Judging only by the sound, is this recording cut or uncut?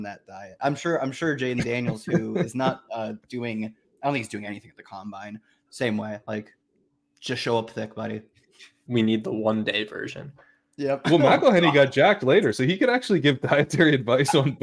cut